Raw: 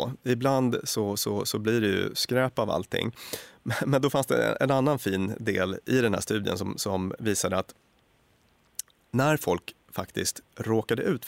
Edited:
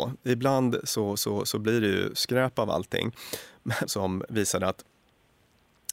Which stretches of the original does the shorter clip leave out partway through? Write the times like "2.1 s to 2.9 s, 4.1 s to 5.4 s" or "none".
3.8 s to 6.7 s